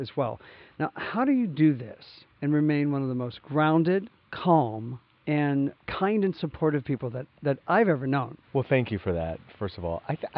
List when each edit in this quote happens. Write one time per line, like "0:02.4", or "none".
0:05.1
0:08.4